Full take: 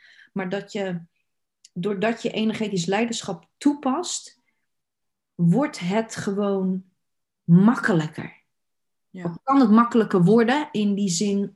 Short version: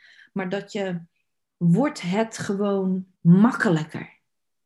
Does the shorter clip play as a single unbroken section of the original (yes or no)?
no